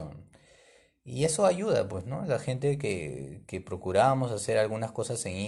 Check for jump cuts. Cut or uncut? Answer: uncut